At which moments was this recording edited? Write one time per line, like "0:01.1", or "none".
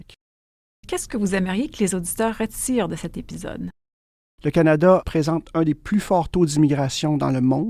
0:04.4